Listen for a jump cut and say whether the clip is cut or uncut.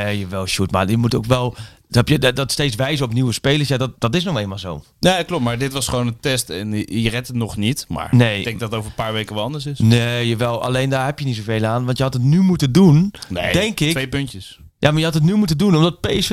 cut